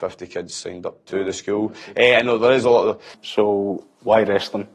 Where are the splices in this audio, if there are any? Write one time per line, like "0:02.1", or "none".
0:03.1